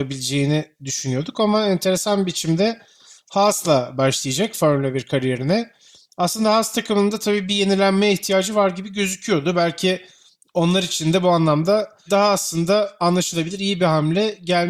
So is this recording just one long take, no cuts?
yes; 0 cuts

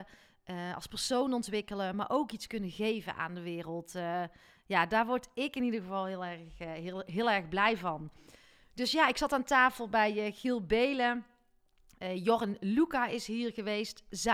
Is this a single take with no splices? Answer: yes; 0 cuts

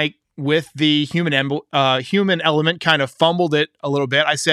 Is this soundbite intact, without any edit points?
yes; 0 cuts

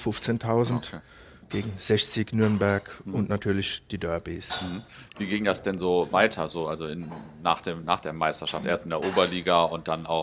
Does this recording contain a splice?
no; 0 cuts

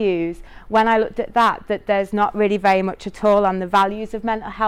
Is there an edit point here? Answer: no; 0 cuts

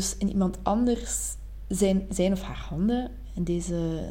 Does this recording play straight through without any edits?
yes; 0 cuts

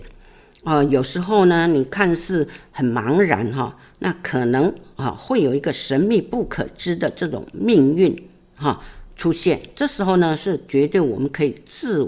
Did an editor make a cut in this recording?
no; 0 cuts

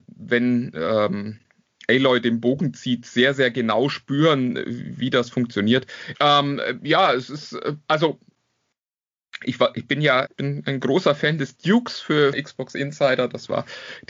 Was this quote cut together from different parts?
yes; 3 cuts; at 6.1 s, 10.3 s, 12.3 s

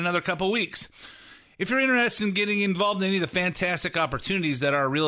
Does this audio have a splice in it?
no; 0 cuts

